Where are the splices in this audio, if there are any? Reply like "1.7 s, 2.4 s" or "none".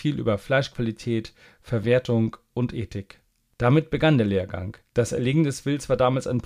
4.9 s